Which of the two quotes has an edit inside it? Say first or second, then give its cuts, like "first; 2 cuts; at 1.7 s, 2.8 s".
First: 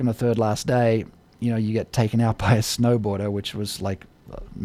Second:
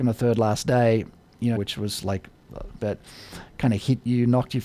second; 2 cuts; at 1.6 s, 2.8 s